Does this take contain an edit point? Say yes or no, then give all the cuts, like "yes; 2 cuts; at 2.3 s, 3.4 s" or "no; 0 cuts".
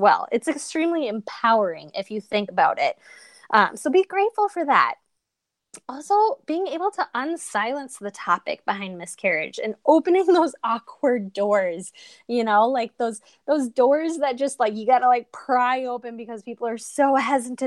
no; 0 cuts